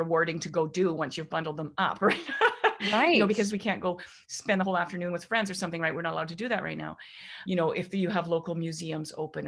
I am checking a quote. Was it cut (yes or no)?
yes